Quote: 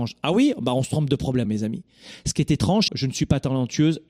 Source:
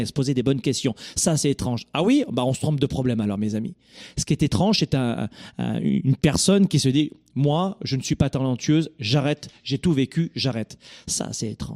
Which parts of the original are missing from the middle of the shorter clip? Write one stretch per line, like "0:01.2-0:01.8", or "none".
0:03.2-0:03.4
0:04.8-0:07.8

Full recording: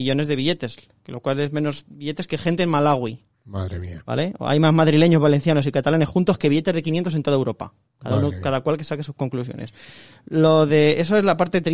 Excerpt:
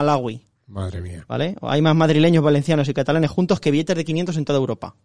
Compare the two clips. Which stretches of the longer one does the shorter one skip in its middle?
none

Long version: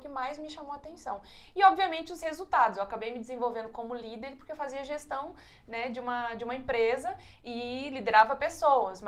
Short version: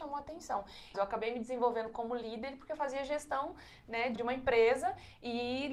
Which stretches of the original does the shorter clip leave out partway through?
0:01.5-0:02.7
0:05.9-0:06.4

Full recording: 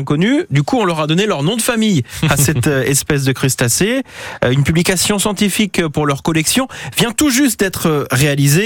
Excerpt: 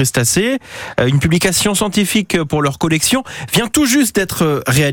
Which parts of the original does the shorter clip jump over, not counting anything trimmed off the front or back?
none

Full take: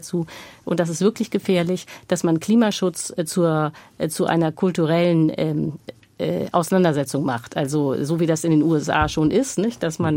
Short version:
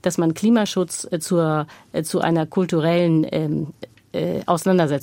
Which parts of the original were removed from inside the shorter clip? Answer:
none

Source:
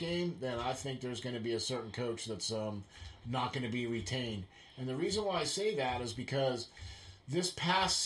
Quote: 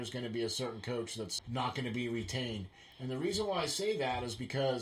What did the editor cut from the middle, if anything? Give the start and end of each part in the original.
0:02.5-0:03.2

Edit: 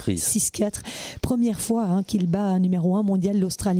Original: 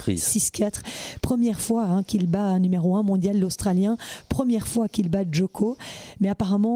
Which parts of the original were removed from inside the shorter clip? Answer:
none

